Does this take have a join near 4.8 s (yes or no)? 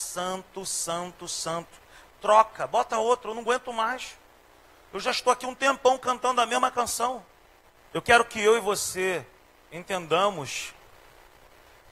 no